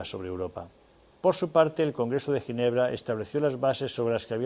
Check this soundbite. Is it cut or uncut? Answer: cut